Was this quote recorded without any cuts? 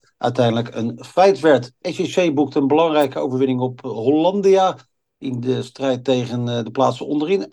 no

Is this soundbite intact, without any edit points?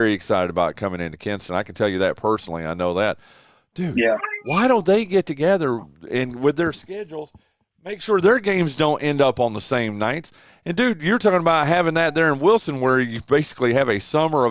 yes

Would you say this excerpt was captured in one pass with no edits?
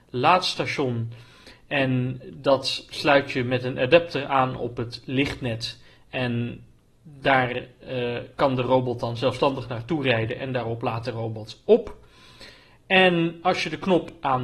yes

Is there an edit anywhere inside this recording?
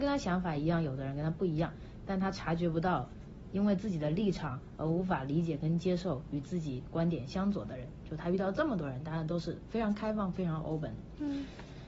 no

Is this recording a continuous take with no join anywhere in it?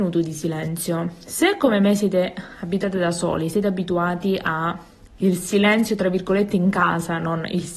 yes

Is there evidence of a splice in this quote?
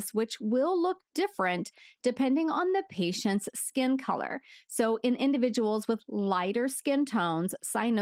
no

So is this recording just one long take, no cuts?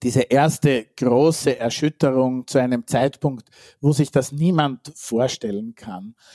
yes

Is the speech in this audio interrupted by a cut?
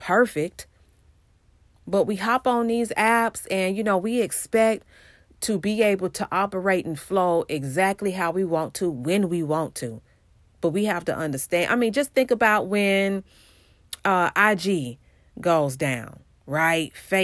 no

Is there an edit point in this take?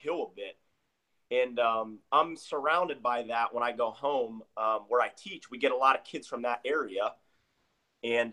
no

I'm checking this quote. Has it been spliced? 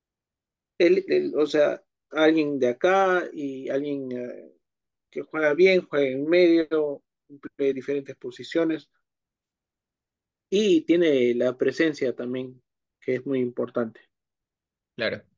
no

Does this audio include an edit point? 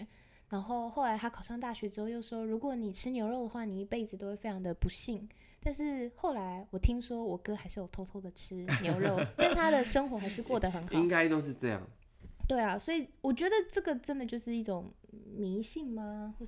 no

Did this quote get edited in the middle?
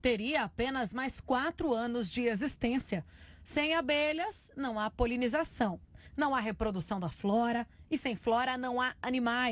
no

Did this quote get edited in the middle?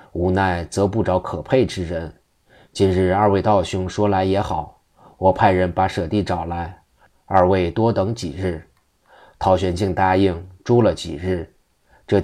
no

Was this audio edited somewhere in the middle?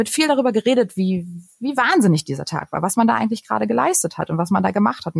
no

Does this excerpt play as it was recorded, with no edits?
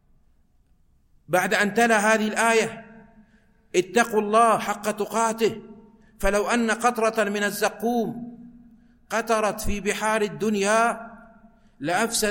yes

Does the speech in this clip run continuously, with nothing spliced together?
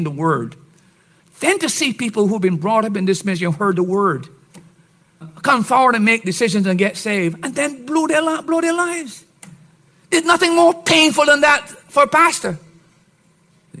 no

